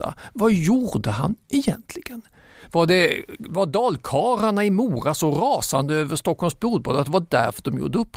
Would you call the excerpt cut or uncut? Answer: uncut